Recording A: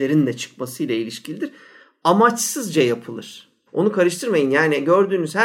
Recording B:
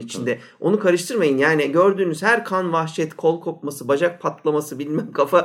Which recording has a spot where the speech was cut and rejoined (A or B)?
A